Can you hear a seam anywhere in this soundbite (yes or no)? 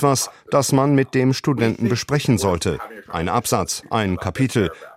no